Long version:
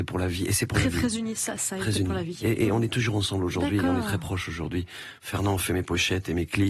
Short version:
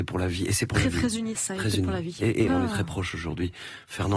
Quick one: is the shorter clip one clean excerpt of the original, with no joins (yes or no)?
no